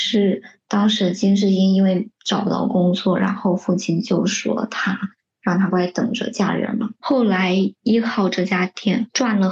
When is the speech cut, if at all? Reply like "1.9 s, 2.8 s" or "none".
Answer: 5.7 s, 7.0 s